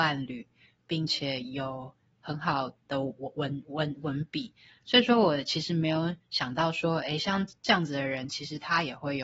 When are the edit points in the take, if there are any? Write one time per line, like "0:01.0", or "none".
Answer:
none